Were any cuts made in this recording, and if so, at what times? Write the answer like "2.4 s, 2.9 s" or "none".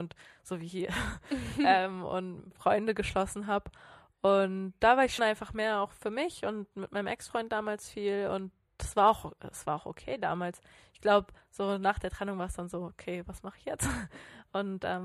5.2 s